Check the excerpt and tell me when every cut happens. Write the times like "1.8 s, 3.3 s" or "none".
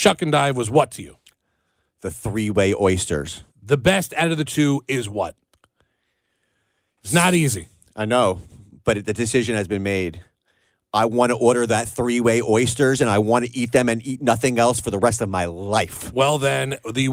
3.5 s